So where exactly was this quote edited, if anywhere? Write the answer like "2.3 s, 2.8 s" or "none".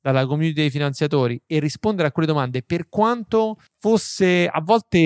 3.7 s